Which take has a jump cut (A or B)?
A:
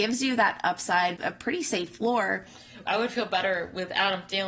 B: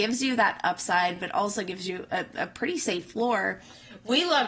A